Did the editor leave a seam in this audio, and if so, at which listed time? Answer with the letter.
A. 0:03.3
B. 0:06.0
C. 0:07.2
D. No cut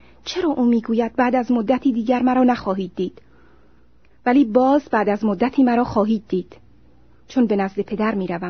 D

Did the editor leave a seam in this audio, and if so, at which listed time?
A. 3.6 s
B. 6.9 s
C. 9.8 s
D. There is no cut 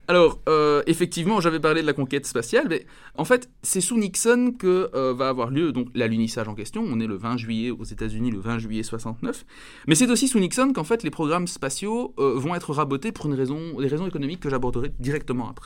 A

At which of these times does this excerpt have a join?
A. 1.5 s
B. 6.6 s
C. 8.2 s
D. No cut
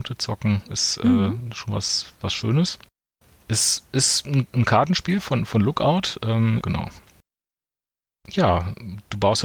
B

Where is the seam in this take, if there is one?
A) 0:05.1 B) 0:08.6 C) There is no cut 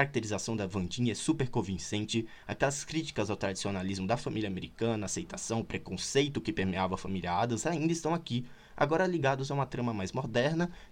C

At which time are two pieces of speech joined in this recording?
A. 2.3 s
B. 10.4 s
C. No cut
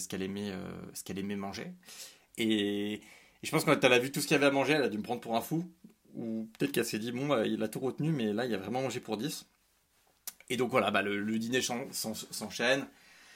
A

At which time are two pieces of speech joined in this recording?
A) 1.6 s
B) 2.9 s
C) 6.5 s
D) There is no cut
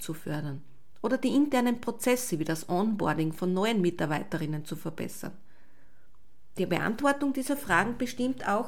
D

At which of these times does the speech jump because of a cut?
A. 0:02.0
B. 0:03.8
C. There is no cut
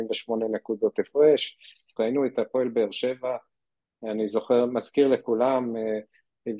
A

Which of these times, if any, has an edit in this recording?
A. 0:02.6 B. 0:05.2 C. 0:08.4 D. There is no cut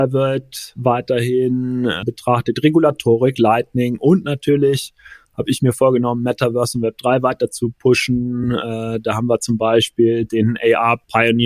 D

